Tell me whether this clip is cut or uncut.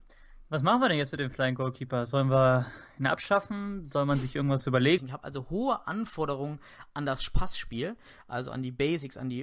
cut